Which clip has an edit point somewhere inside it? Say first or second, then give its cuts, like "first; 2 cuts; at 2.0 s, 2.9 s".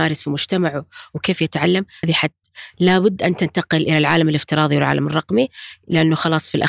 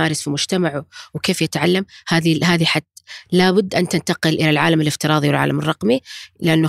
first; 1 cut; at 2.0 s